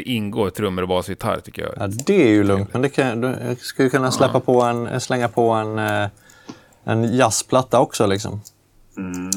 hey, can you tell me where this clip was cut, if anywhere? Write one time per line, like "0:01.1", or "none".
none